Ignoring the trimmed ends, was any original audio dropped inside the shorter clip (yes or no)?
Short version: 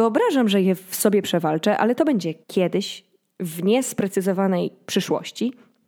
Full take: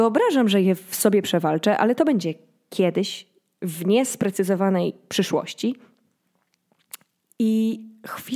yes